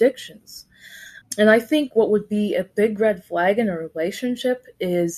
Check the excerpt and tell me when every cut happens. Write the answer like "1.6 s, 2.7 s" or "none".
1.2 s